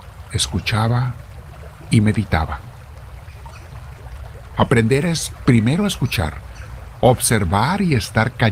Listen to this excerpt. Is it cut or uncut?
cut